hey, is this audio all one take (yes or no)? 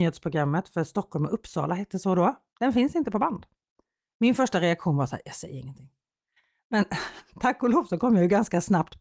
no